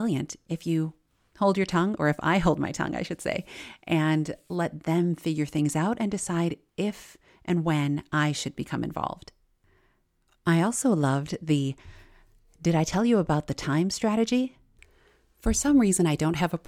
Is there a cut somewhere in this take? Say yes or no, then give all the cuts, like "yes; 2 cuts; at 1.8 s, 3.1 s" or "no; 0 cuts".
no; 0 cuts